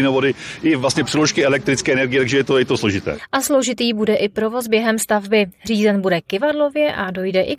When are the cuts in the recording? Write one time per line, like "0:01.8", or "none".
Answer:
none